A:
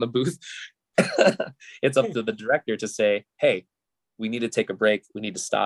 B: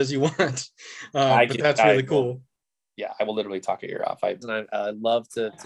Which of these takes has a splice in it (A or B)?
B